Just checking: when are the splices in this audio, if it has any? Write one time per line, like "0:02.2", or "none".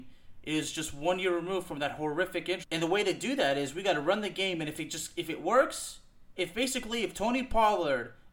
0:02.6